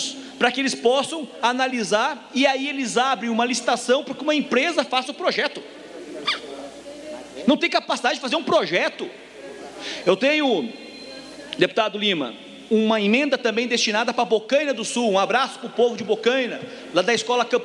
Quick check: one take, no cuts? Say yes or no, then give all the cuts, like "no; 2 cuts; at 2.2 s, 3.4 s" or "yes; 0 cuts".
yes; 0 cuts